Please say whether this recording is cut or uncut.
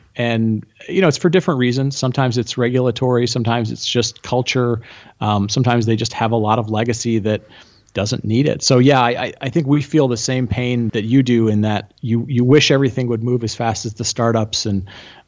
cut